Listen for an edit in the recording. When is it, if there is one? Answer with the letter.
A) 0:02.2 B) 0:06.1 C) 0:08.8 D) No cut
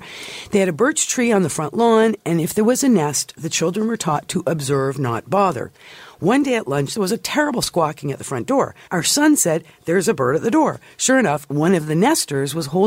C